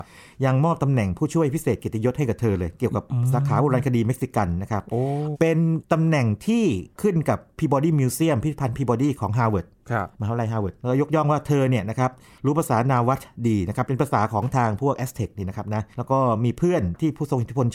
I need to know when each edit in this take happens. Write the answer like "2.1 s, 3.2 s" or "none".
5.3 s, 15.9 s